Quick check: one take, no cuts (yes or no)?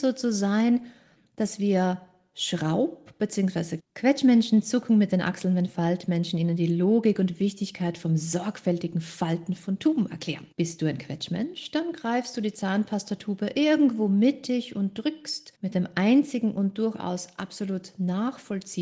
no